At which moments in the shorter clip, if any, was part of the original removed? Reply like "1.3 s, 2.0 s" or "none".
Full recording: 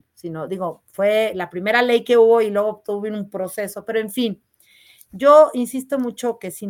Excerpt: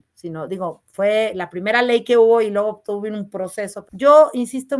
3.8 s